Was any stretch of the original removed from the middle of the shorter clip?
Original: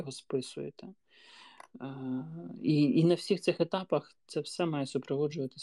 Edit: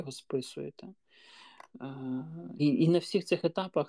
yes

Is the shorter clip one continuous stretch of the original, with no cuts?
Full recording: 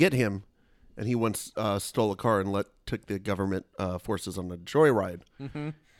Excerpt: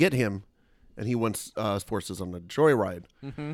no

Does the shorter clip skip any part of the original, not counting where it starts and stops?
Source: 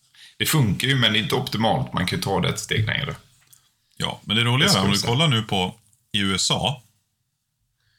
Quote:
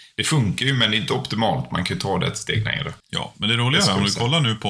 yes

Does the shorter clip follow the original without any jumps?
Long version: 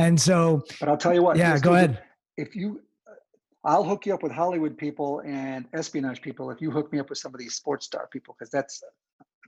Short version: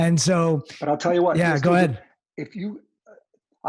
yes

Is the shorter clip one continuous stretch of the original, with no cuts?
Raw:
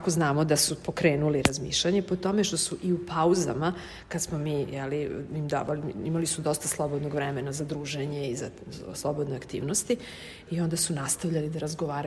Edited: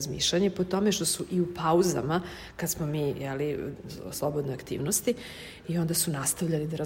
no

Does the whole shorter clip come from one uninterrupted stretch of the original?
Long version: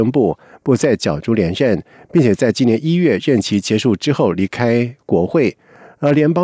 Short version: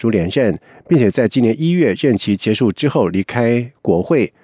yes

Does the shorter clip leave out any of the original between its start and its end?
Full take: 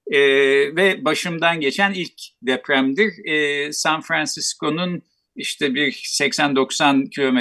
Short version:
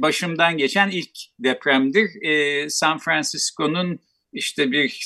no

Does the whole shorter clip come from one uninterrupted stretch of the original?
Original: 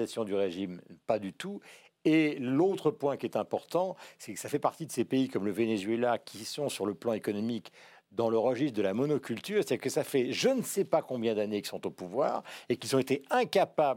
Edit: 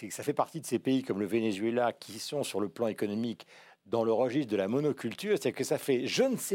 yes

